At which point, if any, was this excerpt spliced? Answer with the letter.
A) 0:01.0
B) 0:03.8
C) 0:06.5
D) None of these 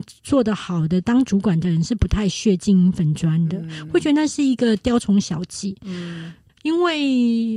C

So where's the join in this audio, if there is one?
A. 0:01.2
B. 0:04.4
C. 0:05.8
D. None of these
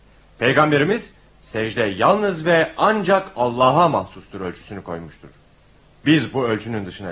D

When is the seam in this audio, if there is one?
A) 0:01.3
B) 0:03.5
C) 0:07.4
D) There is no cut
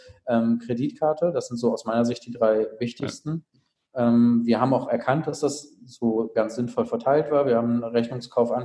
D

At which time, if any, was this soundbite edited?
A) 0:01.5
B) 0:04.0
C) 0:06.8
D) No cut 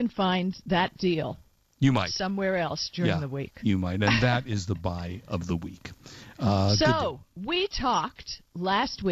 D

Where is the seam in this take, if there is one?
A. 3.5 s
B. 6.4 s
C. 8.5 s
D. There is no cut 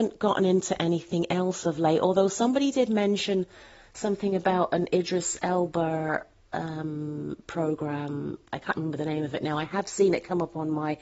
D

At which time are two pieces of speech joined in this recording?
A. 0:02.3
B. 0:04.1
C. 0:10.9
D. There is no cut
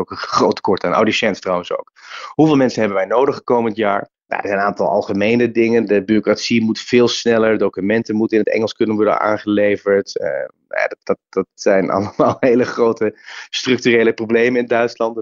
B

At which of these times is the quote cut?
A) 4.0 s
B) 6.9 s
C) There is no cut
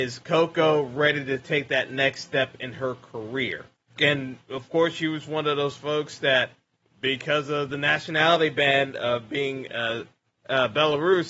A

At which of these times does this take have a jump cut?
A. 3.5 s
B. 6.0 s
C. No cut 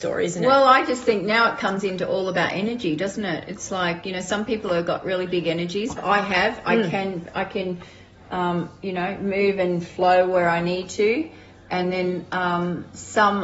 B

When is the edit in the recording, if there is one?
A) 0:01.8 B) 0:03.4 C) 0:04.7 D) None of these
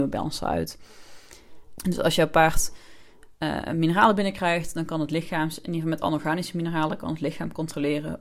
A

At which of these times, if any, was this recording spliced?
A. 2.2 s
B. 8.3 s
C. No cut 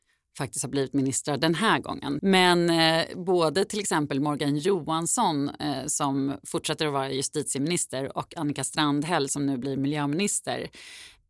A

